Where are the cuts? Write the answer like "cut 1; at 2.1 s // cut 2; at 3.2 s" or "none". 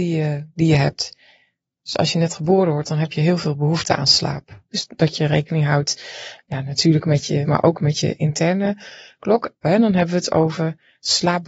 cut 1; at 4.7 s // cut 2; at 7.4 s // cut 3; at 9.6 s